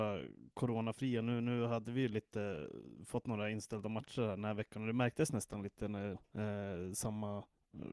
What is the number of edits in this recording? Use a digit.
1